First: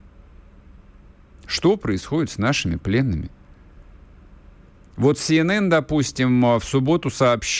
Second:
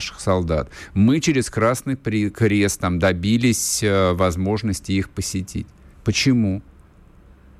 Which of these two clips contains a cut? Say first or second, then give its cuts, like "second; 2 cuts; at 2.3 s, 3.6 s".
second; 1 cut; at 5.9 s